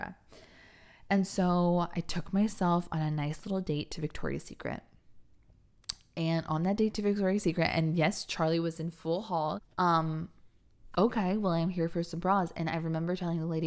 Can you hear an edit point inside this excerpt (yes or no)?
yes